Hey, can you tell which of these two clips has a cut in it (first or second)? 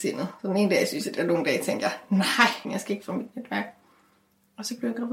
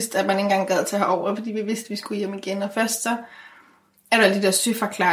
first